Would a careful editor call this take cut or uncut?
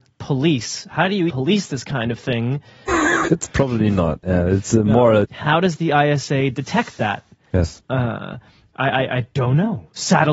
cut